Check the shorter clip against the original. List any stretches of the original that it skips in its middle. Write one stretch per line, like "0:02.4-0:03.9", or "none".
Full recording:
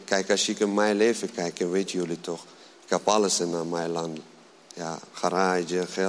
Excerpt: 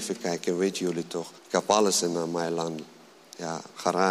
0:02.5-0:02.8